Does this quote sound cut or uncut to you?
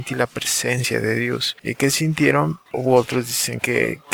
cut